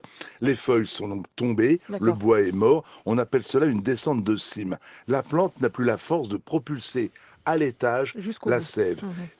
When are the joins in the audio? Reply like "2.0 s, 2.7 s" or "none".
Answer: none